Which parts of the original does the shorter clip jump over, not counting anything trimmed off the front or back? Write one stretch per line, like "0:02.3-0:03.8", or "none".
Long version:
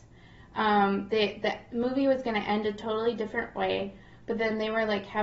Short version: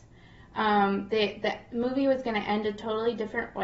none